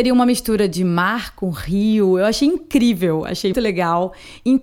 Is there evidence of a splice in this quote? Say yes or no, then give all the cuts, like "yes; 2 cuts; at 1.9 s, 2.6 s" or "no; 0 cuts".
yes; 1 cut; at 3.5 s